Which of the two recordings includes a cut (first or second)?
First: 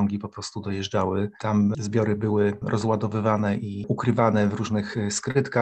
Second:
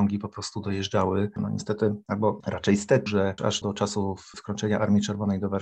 second